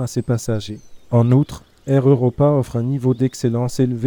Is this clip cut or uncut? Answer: cut